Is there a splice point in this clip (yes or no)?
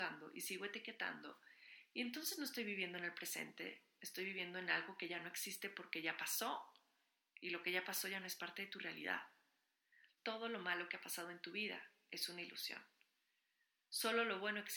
yes